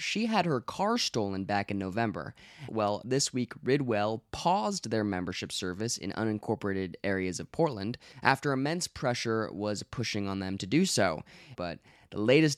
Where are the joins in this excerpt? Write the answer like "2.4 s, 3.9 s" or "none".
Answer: 2.7 s, 11.6 s

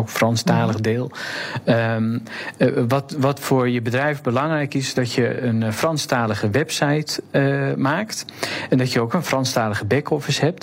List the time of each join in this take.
none

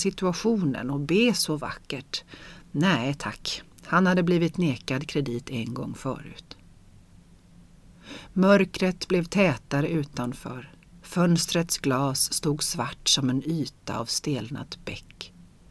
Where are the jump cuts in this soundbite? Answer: none

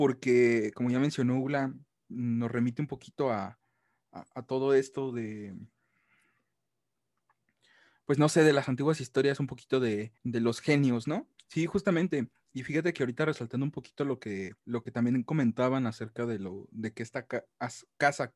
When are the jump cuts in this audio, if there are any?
10.2 s, 11.4 s, 14.6 s

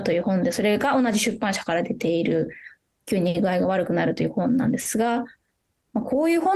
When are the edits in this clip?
none

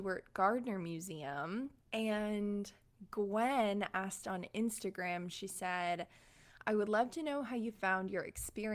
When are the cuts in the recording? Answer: 1.8 s

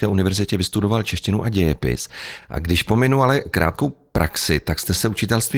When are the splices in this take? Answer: none

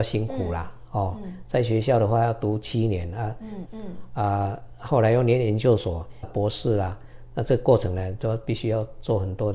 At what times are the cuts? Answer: 3.6 s, 6.2 s

